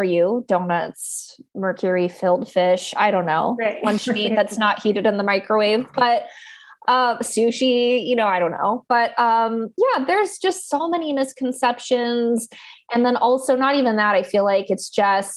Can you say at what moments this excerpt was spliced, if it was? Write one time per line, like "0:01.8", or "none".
none